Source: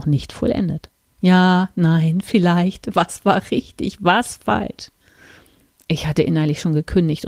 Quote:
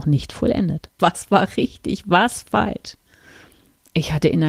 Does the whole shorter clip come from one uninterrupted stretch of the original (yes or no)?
no